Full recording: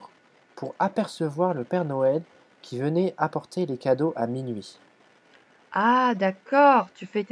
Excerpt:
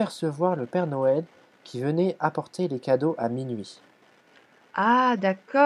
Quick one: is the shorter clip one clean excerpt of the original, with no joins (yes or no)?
yes